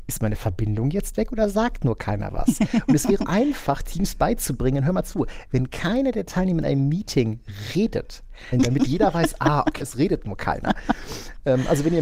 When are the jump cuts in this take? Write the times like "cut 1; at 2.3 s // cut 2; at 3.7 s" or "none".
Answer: cut 1; at 3.2 s // cut 2; at 8.5 s // cut 3; at 9.8 s